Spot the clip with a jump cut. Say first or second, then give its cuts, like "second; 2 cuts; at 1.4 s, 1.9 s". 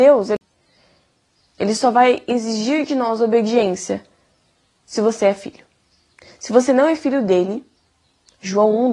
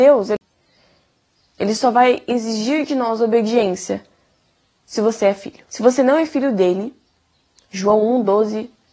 second; 1 cut; at 5.7 s